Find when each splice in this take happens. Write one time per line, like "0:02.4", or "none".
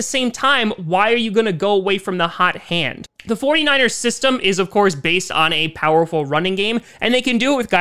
none